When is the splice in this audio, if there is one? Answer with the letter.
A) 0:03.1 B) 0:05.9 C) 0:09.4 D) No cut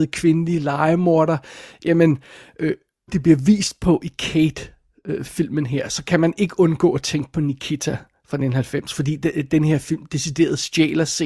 A